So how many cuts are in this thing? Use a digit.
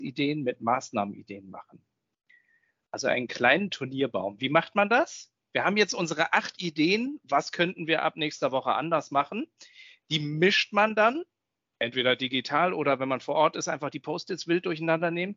0